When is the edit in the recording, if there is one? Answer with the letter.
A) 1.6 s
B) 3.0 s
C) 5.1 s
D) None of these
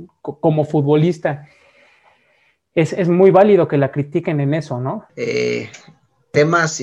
C